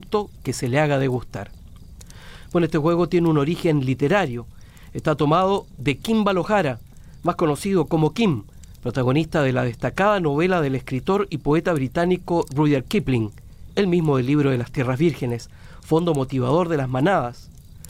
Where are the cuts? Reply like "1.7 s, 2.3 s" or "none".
none